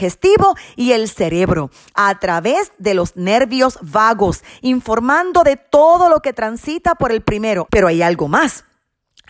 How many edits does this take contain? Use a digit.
1